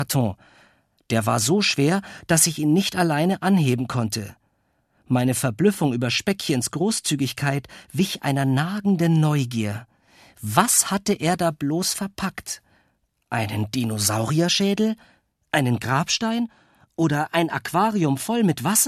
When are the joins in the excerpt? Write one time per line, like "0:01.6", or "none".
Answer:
none